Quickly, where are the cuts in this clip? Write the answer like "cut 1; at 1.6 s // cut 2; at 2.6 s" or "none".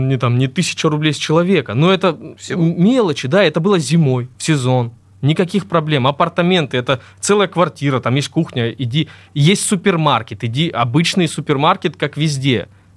cut 1; at 4.3 s